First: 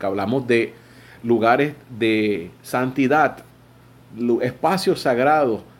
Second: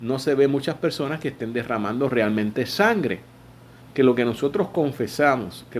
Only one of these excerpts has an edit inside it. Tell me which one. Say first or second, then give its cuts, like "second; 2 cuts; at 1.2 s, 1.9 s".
second; 1 cut; at 3.8 s